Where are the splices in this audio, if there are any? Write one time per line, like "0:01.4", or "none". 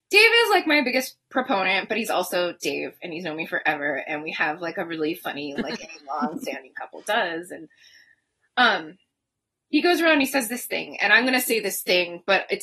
0:05.6